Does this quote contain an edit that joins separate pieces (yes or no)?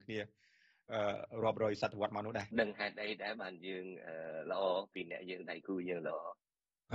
yes